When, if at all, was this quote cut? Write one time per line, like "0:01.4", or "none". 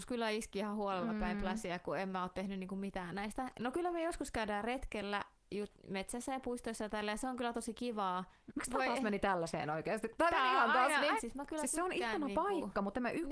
0:08.5
0:11.2